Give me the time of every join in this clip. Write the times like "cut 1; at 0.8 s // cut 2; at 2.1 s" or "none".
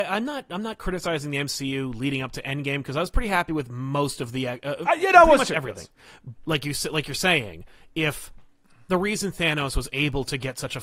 cut 1; at 6.4 s